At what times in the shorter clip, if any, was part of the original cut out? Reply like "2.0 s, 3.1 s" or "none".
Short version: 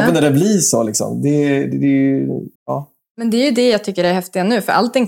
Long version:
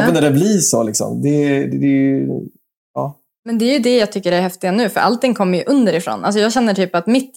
2.5 s